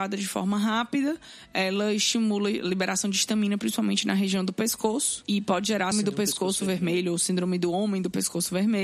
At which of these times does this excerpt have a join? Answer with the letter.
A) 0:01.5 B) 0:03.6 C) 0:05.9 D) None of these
C